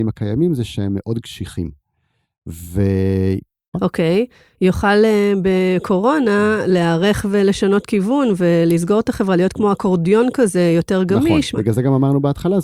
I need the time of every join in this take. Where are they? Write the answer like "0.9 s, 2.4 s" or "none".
3.7 s, 11.5 s